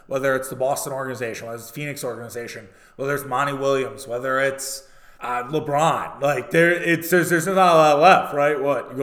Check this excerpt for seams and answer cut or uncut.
cut